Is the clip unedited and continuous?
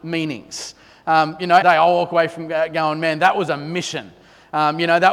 no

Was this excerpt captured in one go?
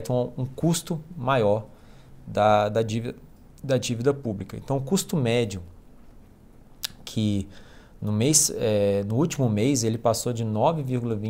yes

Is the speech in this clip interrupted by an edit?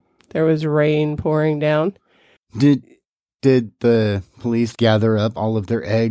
yes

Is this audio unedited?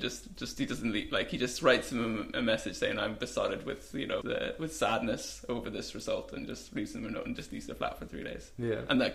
no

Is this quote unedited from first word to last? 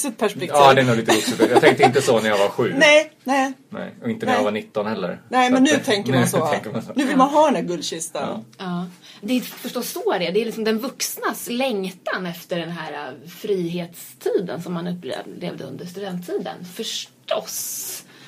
no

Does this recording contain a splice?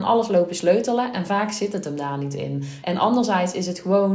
yes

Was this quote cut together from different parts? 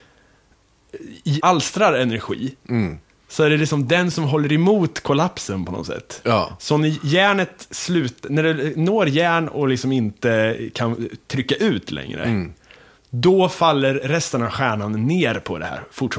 yes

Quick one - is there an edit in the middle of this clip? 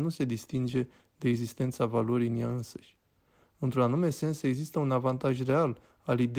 no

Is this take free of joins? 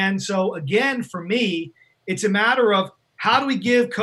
yes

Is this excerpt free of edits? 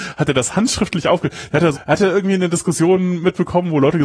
no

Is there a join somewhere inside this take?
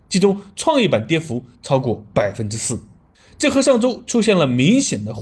no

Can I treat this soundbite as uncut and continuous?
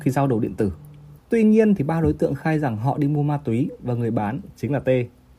no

